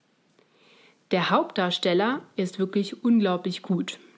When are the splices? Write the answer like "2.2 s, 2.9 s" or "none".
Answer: none